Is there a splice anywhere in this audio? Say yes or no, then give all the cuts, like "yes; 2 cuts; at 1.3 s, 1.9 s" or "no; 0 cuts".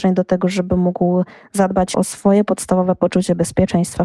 yes; 1 cut; at 1.9 s